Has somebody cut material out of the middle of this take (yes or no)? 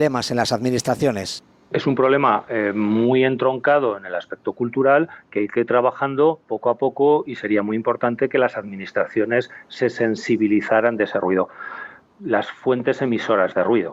yes